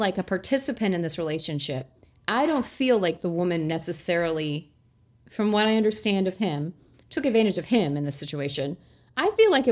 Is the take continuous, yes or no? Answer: yes